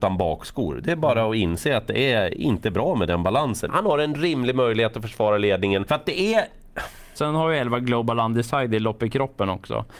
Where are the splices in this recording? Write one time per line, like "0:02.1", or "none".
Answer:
0:03.7
0:05.9
0:07.1